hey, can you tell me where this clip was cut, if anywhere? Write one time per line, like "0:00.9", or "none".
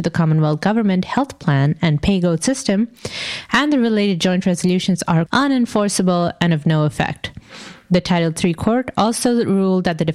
0:05.3